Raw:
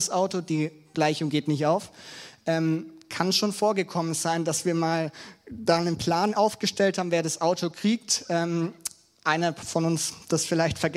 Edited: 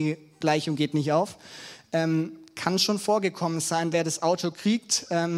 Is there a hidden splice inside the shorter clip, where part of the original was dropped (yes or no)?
yes